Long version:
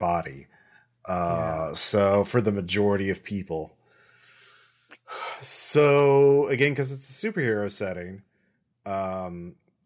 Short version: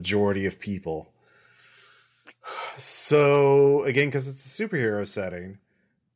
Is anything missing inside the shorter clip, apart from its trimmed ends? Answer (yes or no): no